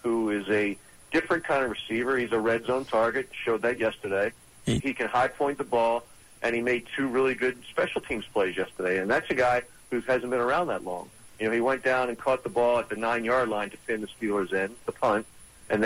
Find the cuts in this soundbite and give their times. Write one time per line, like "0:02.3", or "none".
0:04.8